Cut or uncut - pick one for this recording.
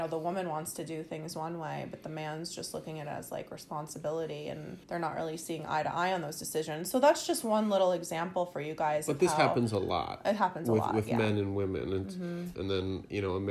cut